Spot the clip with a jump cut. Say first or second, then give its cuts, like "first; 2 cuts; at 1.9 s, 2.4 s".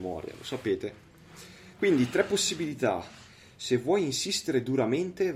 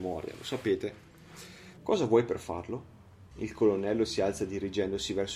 second; 2 cuts; at 1.8 s, 3.3 s